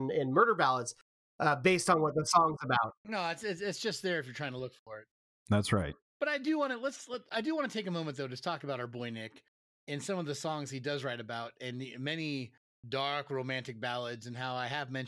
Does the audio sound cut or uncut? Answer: cut